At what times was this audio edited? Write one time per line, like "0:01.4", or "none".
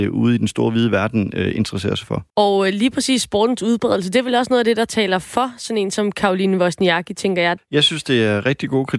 0:02.3
0:07.6